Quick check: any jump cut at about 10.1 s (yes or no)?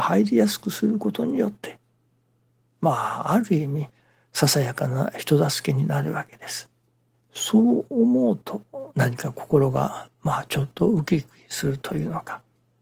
yes